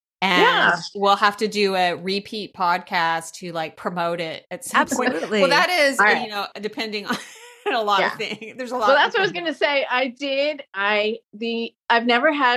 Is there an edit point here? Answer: no; 0 cuts

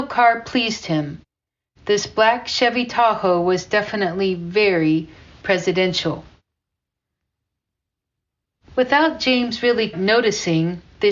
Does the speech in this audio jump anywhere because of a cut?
yes; 1 cut; at 9.9 s

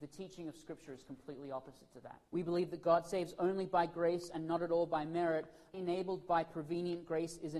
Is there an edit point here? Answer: yes; 2 cuts; at 2.3 s, 5.7 s

